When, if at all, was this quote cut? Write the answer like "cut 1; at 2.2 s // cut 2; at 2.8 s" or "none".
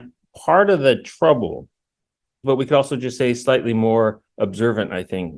cut 1; at 2.4 s